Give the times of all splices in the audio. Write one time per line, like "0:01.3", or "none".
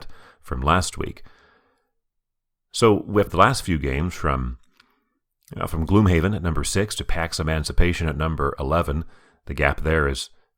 0:03.3